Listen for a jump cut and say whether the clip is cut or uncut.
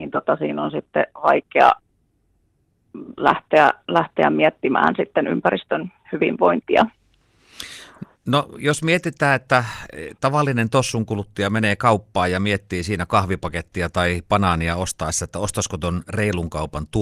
uncut